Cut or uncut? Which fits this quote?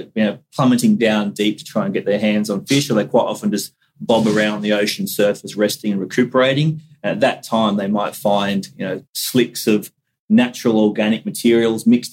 uncut